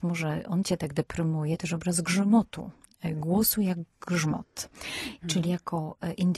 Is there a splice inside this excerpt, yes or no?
yes